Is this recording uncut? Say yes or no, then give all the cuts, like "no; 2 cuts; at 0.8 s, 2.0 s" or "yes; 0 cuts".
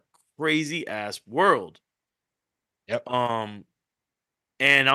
yes; 0 cuts